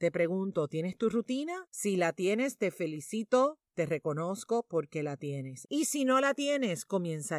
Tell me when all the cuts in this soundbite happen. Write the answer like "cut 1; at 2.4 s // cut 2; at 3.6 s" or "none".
cut 1; at 1.7 s // cut 2; at 5.6 s